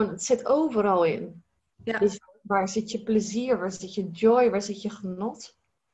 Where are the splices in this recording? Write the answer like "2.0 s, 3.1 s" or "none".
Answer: 1.7 s